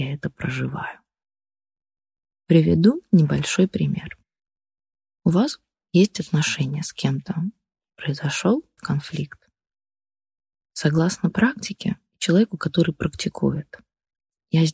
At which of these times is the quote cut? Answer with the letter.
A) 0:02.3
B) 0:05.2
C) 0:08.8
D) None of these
C